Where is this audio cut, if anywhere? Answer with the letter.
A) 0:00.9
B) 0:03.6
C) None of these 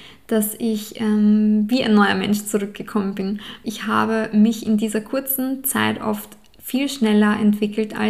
B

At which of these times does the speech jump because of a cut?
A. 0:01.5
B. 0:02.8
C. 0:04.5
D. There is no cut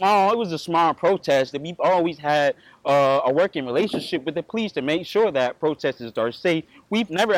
A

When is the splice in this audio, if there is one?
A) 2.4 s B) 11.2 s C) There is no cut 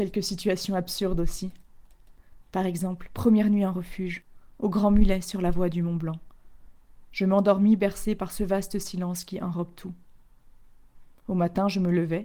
C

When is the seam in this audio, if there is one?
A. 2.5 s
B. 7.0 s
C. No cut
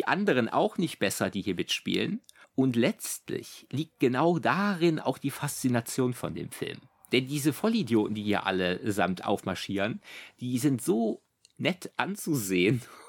C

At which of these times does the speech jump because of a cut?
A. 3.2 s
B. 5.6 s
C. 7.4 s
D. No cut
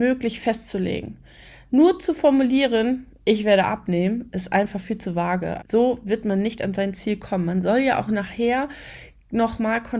B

